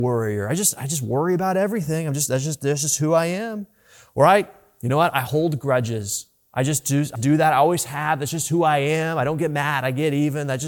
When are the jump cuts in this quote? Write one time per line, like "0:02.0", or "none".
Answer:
0:07.2